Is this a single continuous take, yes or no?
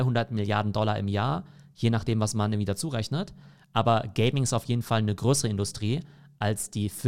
yes